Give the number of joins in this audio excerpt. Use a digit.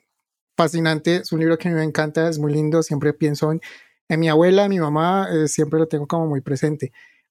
0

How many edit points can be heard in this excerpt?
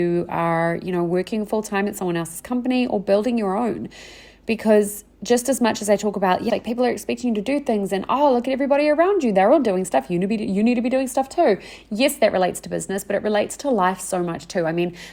1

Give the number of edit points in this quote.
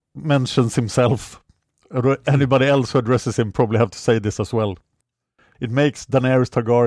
0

